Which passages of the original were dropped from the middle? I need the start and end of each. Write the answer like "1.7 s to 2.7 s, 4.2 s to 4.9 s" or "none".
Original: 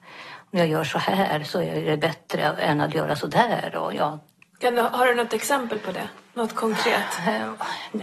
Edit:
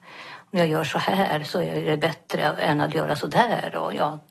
none